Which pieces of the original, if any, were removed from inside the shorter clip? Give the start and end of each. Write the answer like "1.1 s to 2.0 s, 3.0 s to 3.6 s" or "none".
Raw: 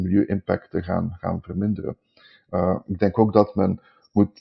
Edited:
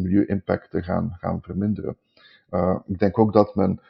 none